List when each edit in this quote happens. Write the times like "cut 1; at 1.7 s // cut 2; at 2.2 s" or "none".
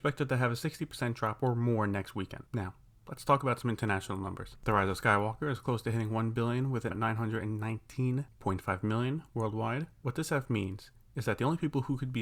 cut 1; at 6.9 s // cut 2; at 10.0 s